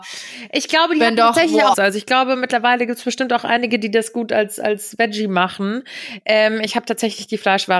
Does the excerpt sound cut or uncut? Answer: cut